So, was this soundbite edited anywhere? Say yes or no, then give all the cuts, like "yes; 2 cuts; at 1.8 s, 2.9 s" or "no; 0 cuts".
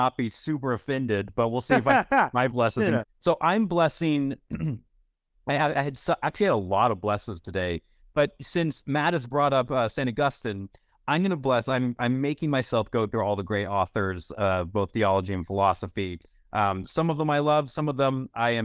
yes; 2 cuts; at 3.0 s, 8.0 s